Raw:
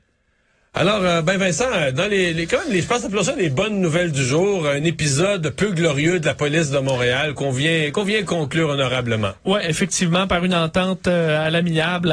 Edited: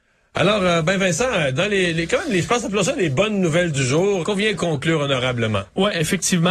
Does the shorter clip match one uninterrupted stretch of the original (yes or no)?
no